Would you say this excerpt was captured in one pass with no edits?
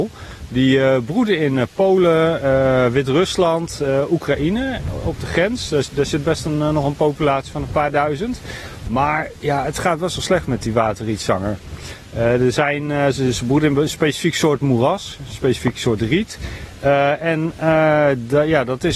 yes; 0 cuts

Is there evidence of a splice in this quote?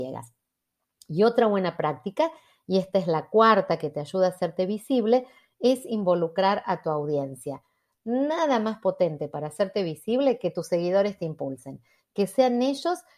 no; 0 cuts

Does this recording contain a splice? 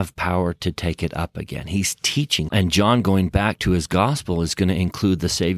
yes; 1 cut; at 2.5 s

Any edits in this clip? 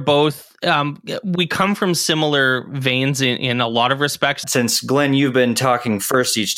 yes; 1 cut; at 4.4 s

